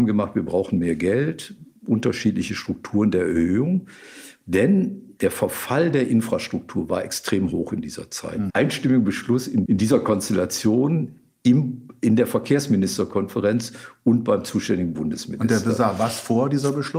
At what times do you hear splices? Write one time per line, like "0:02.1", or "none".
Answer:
0:08.5
0:09.7